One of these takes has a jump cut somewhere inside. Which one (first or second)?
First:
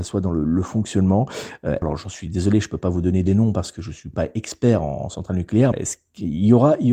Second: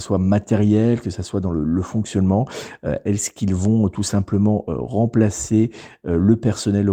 first